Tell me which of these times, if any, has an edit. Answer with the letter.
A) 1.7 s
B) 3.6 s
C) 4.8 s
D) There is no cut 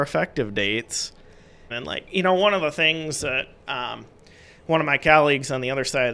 A